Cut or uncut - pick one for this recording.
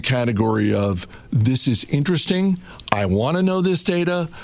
uncut